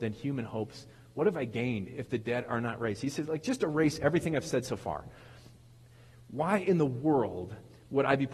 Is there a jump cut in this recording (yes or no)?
no